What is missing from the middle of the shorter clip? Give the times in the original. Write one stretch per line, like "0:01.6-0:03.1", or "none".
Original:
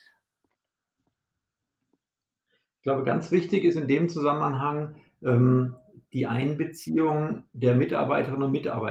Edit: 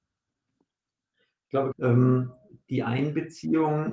0:03.0-0:05.1